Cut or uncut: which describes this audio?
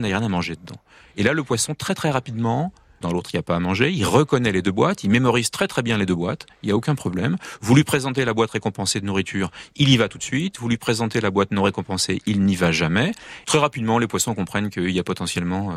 cut